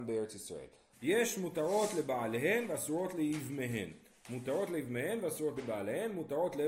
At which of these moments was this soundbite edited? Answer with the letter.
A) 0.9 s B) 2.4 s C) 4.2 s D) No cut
A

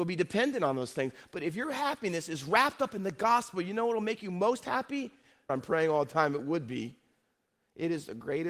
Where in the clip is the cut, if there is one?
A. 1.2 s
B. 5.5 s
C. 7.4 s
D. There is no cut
B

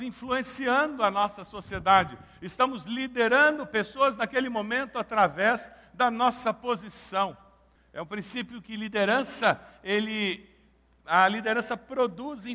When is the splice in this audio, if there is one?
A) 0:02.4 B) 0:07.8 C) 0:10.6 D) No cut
B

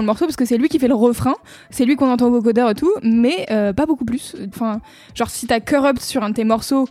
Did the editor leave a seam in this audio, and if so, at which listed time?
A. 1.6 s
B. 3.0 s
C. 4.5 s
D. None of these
C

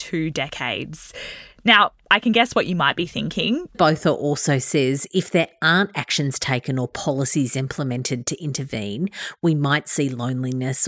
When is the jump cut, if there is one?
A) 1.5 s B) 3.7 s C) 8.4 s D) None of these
B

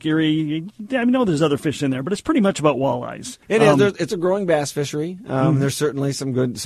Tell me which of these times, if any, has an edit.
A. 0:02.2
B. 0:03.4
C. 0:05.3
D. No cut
B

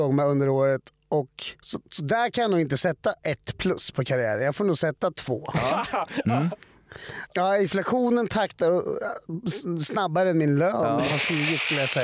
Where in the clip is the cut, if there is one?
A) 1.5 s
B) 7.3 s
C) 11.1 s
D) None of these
B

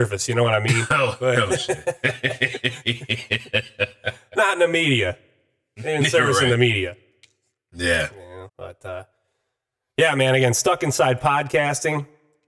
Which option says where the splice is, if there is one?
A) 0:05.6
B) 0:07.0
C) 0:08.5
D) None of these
C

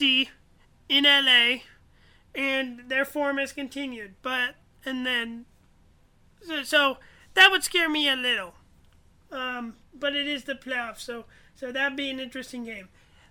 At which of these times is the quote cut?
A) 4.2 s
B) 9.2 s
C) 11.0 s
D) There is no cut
D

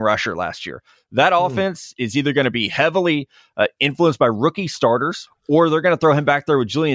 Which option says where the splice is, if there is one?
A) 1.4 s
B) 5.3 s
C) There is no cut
B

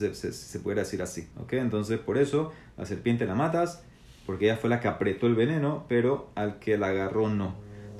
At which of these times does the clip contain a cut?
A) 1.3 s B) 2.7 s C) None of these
A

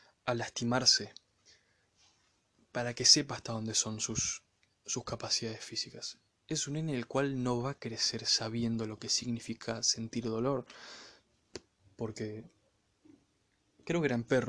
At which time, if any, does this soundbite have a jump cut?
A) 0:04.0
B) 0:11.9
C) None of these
B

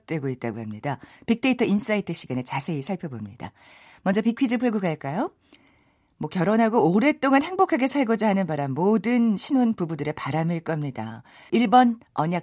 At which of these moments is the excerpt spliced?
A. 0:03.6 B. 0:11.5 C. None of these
B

